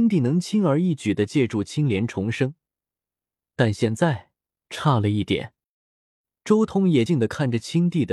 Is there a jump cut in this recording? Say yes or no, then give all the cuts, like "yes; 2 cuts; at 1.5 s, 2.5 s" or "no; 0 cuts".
yes; 1 cut; at 7.1 s